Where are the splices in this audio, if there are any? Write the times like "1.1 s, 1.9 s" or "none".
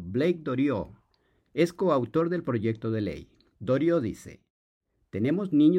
3.5 s